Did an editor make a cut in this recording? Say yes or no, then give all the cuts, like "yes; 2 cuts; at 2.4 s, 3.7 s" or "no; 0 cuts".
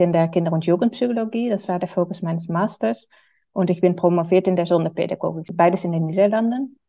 no; 0 cuts